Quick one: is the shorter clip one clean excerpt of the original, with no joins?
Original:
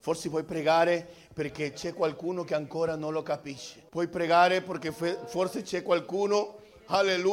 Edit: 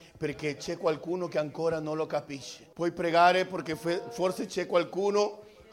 yes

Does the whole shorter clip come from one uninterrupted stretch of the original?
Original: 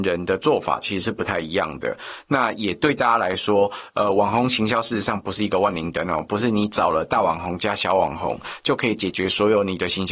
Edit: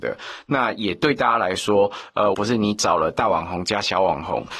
no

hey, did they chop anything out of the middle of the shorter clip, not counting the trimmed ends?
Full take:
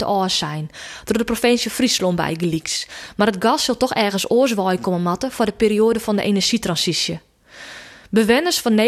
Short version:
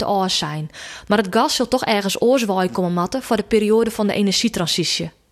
yes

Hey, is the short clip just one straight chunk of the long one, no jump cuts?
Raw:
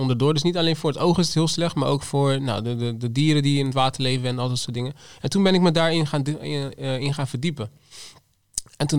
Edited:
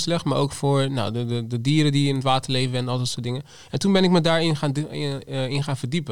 yes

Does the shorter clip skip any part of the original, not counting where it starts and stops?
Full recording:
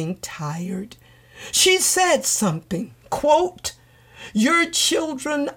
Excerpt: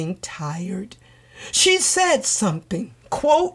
no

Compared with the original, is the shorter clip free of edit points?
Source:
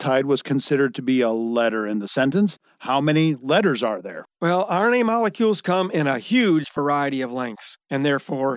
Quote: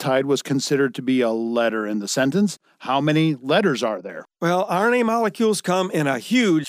yes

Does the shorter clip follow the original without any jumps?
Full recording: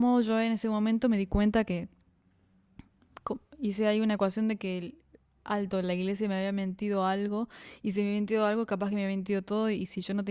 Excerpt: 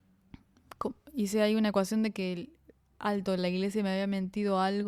yes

